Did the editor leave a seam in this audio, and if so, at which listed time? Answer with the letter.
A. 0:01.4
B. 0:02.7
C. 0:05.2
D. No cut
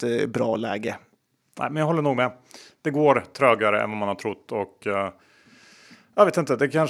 D